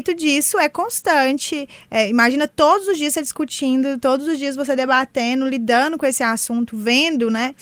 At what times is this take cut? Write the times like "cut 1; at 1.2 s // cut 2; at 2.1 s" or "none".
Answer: none